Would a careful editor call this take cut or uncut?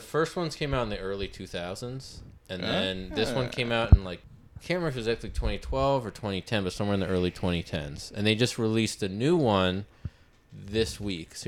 uncut